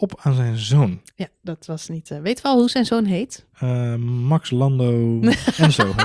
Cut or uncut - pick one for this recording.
uncut